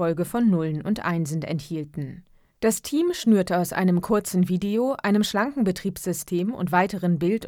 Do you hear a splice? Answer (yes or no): yes